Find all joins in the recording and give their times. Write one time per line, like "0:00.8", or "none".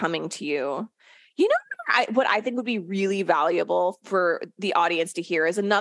none